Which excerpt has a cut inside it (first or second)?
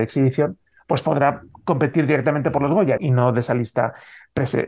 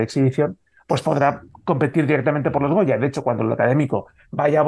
first